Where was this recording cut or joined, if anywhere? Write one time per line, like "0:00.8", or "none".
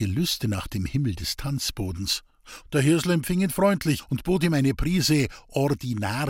0:02.6